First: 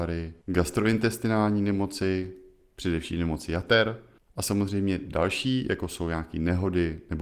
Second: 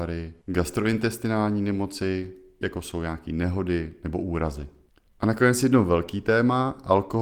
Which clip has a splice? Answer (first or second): second